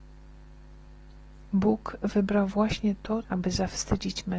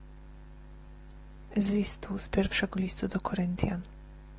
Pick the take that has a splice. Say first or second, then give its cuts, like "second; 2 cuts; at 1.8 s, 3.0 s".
first; 2 cuts; at 1.5 s, 3.2 s